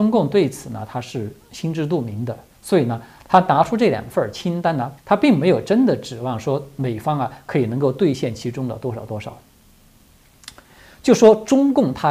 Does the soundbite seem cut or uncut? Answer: cut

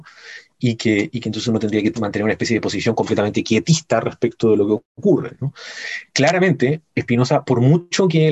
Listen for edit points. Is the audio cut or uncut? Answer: uncut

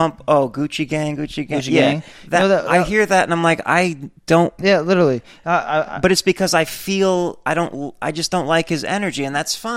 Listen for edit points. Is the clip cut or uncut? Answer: cut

